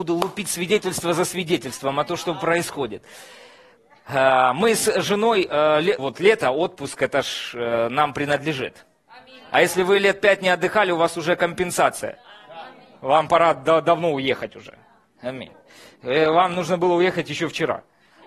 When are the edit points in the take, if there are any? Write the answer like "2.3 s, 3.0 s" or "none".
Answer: 6.0 s

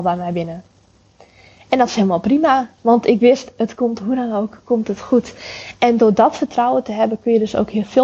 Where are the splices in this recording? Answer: none

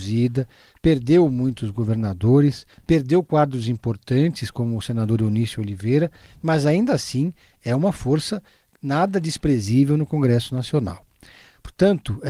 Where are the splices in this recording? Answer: none

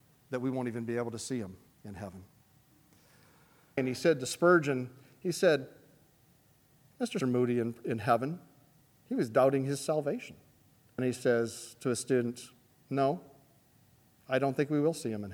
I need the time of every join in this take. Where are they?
3.8 s, 7.2 s, 11.0 s

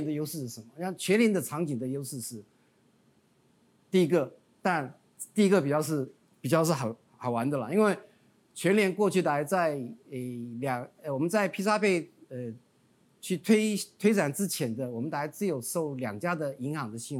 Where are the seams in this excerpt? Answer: none

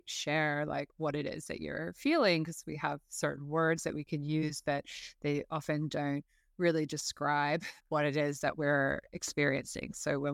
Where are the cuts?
7.8 s, 9.1 s

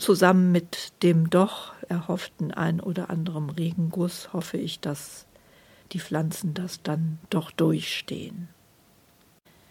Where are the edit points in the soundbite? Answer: 1.9 s

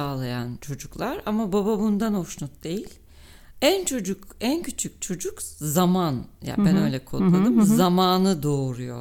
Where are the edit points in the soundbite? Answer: none

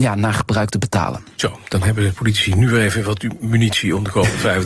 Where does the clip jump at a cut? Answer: none

